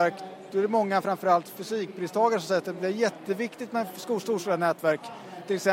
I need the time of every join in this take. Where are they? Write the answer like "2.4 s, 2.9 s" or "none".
none